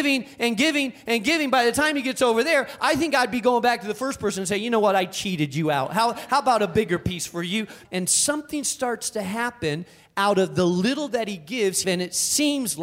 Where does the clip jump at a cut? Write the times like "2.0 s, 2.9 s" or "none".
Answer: 7.8 s, 11.8 s